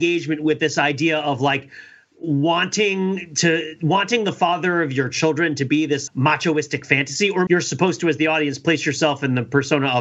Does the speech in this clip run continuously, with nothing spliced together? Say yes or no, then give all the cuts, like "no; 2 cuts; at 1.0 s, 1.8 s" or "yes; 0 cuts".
no; 2 cuts; at 6.1 s, 7.5 s